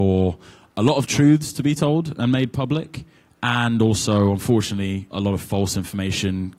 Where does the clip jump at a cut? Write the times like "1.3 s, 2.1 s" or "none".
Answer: 5.1 s